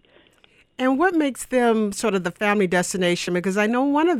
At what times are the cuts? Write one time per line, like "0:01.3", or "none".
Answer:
none